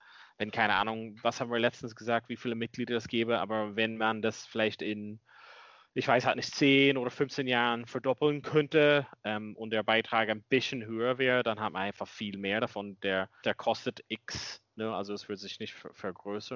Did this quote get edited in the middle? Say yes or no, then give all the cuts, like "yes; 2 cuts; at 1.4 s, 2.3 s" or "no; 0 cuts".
yes; 1 cut; at 13.4 s